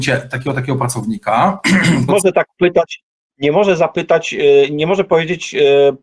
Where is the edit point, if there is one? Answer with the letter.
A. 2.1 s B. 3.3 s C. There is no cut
A